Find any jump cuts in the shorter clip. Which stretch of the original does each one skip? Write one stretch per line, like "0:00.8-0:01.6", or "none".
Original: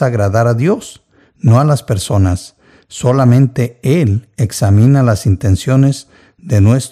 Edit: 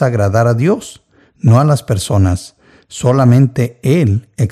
none